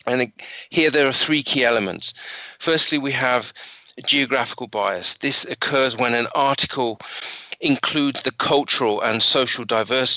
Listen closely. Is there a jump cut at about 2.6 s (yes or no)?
no